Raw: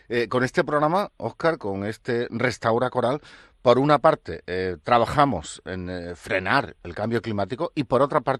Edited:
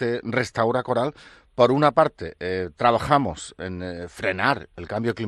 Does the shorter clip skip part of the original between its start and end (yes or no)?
no